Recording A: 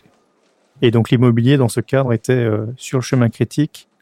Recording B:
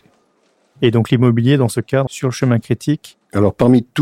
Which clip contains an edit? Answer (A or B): B